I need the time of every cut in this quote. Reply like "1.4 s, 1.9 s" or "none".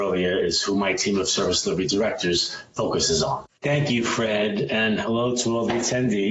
3.5 s